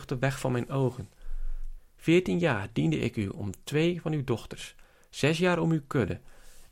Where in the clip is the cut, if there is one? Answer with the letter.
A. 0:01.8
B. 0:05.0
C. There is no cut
A